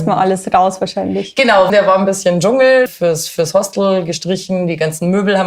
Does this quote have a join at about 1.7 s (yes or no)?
yes